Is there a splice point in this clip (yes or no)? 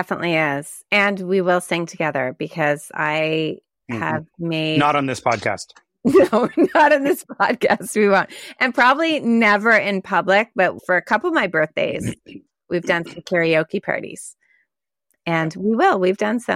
no